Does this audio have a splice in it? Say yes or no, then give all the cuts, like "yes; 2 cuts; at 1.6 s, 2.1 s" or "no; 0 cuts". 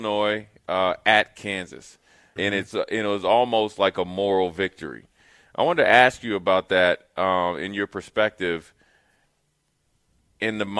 yes; 1 cut; at 2.4 s